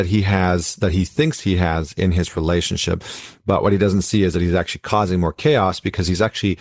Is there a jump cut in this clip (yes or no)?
no